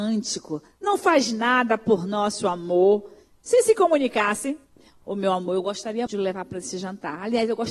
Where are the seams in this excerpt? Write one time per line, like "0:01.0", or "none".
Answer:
0:06.1